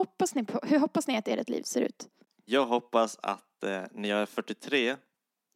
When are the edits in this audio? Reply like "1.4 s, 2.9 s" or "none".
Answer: none

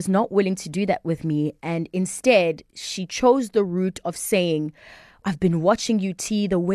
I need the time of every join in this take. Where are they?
5.2 s

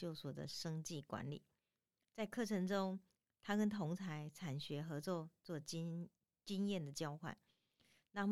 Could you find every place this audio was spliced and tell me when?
none

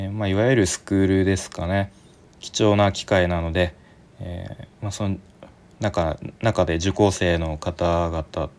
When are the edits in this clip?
4.7 s

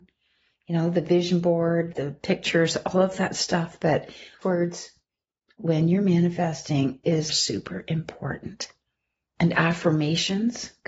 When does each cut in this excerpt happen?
1.9 s, 7.3 s

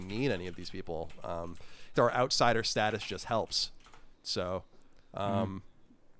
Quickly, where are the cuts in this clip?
1.9 s, 4.1 s

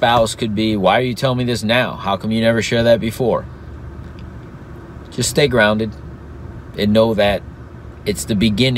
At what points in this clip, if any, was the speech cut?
none

